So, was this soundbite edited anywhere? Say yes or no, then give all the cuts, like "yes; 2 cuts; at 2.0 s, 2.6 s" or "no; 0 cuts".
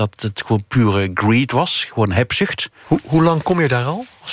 yes; 1 cut; at 2.8 s